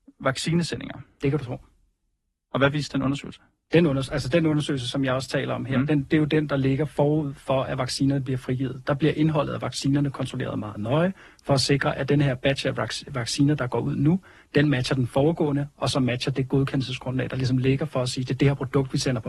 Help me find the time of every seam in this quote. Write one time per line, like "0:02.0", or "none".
none